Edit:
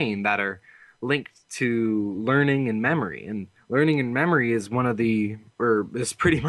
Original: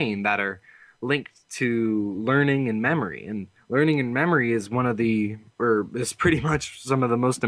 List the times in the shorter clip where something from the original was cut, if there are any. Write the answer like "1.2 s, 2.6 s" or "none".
none